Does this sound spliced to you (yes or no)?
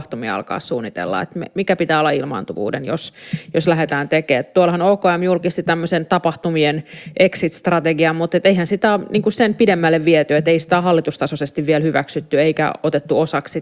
no